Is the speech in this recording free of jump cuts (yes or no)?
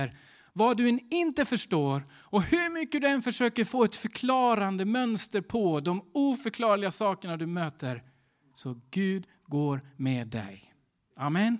no